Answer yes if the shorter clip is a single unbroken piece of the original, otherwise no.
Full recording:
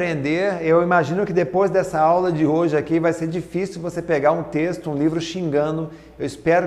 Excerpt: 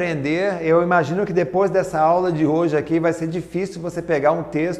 yes